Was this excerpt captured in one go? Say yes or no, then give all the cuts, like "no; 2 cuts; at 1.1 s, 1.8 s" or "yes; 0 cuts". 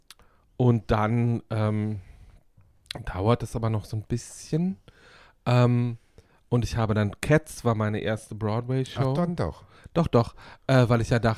yes; 0 cuts